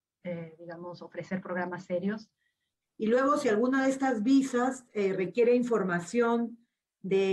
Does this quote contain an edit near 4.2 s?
no; 1 cut; at 2.8 s

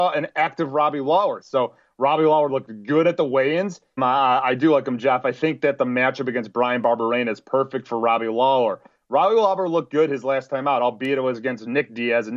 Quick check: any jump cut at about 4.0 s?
yes; 2 cuts; at 1.4 s, 4.0 s

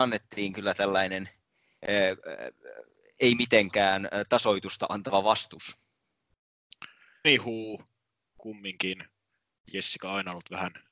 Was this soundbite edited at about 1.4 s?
no; 1 cut; at 7.2 s

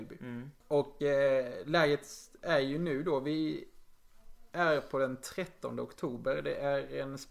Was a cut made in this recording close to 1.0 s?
no; 0 cuts

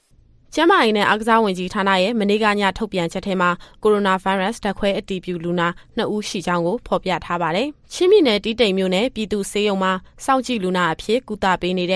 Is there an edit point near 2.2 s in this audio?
no; 1 cut; at 7.8 s

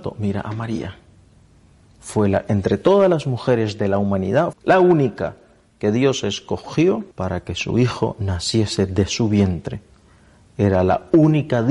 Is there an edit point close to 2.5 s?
no; 2 cuts; at 4.5 s, 7.1 s

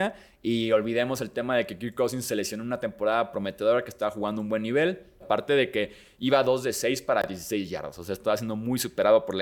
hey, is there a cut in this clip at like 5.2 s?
yes; 1 cut; at 5.2 s

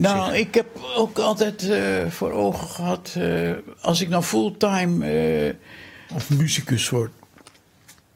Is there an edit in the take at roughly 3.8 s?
no; 1 cut; at 6.1 s

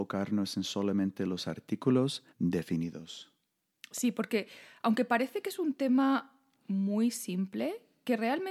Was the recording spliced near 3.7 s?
no; 1 cut; at 2.3 s

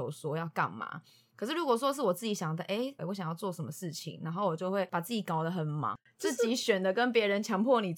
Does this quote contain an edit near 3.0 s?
yes; 1 cut; at 3.0 s

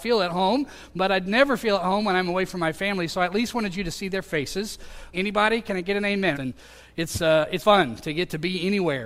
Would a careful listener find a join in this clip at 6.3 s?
yes; 3 cuts; at 5.1 s, 6.3 s, 7.6 s

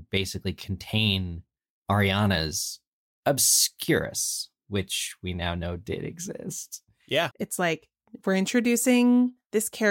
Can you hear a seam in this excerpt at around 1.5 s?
no; 1 cut; at 7.3 s

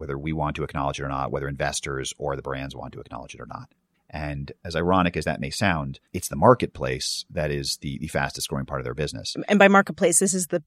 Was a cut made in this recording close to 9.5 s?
no; 2 cuts; at 3.9 s, 6.1 s

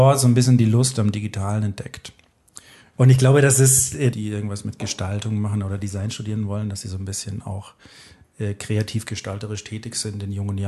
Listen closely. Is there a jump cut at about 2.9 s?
yes; 2 cuts; at 2.9 s, 4.1 s

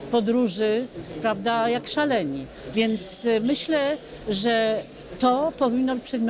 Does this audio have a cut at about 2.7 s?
yes; 1 cut; at 2.7 s

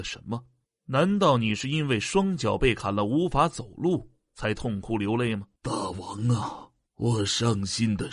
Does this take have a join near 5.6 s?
yes; 2 cuts; at 5.6 s, 6.9 s

